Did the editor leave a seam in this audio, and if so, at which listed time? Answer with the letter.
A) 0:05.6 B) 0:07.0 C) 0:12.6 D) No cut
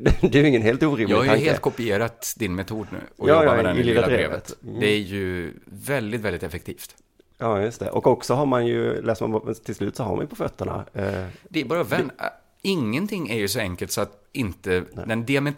D